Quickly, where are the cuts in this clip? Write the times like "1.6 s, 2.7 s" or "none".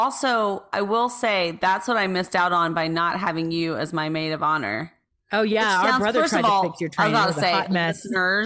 none

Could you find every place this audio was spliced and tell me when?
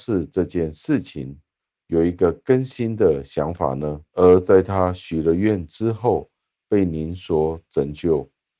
4.1 s

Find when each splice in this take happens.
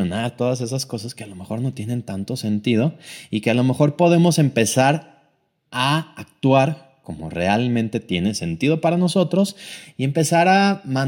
none

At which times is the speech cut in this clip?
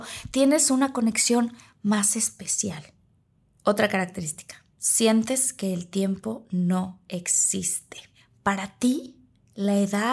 4.7 s

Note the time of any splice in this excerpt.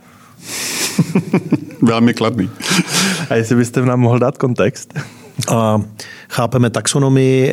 5.4 s

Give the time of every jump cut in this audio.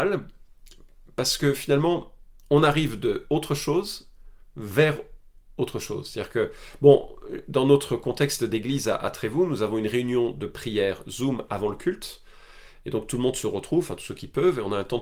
none

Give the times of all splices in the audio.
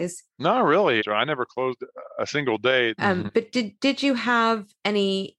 1.0 s, 3.0 s

